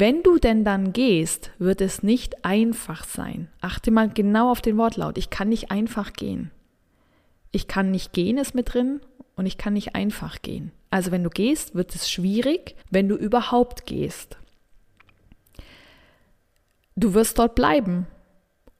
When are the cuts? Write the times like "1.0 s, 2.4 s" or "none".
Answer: 12.8 s